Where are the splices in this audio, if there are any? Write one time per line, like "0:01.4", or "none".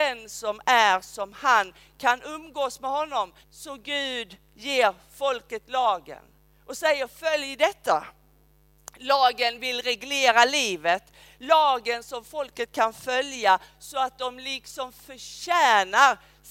0:03.4